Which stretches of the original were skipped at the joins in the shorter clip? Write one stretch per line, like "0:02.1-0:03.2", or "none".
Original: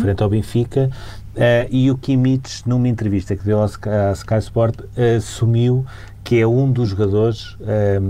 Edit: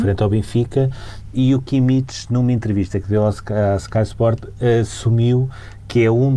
0:01.3-0:01.7